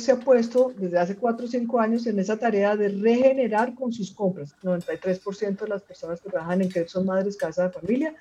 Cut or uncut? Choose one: cut